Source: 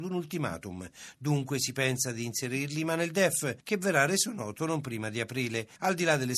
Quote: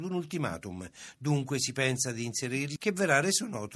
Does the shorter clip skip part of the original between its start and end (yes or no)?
yes